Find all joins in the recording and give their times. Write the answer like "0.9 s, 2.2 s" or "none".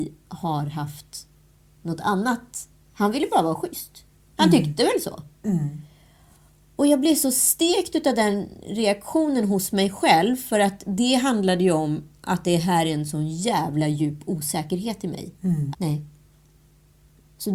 15.7 s